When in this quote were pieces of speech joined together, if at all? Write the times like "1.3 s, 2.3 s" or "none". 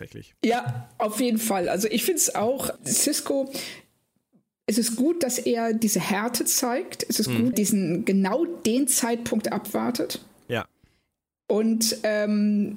2.8 s, 7.5 s